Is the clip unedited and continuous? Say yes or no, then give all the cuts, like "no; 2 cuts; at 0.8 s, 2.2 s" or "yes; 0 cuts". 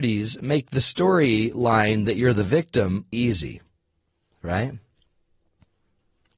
no; 1 cut; at 3.1 s